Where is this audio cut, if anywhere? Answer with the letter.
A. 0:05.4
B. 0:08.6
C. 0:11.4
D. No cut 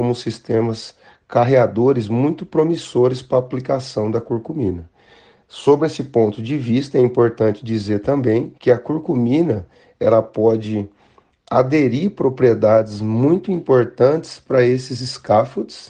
B